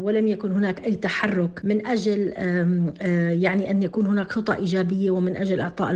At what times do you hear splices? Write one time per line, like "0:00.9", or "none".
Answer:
none